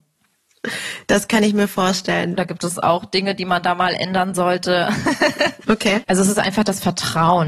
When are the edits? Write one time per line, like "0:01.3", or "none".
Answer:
0:02.4
0:06.0